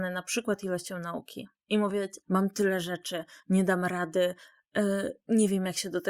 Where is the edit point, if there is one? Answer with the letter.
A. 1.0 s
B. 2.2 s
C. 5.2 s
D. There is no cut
B